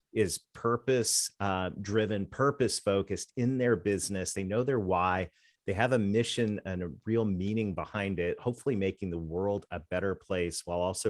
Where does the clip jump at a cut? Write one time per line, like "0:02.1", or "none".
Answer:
none